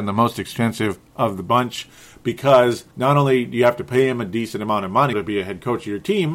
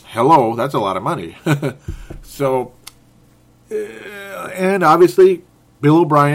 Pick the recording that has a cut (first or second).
first